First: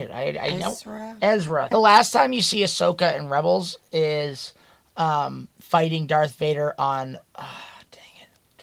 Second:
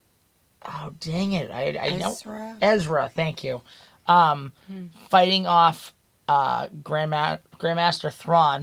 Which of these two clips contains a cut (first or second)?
first